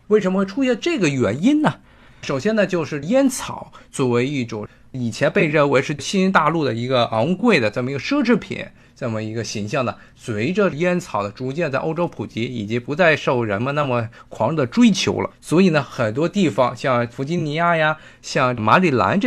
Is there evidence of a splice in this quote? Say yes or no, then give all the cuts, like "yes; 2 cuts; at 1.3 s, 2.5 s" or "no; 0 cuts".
yes; 2 cuts; at 2.1 s, 15.3 s